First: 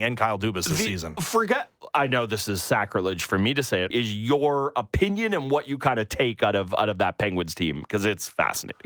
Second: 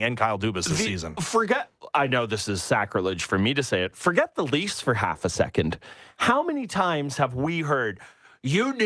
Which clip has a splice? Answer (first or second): first